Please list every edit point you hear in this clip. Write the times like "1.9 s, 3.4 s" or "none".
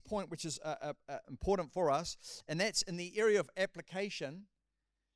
1.2 s